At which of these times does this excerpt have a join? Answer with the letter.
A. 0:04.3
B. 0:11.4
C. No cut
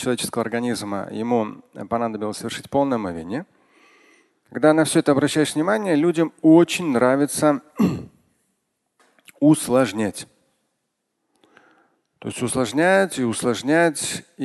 A